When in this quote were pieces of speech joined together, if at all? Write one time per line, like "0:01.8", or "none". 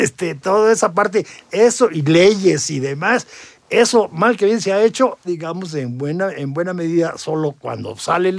0:05.2